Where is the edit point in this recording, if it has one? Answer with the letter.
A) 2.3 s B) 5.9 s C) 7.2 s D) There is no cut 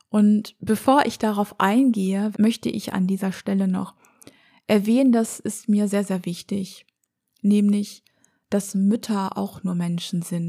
A